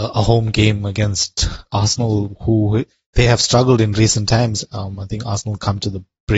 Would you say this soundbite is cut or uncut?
uncut